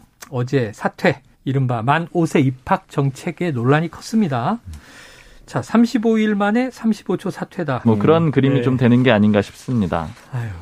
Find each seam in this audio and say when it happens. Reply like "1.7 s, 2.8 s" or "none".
1.3 s, 7.8 s